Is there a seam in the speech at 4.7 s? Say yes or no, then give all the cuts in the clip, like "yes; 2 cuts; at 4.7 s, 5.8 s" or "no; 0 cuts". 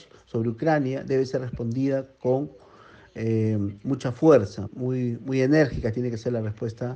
yes; 1 cut; at 4.7 s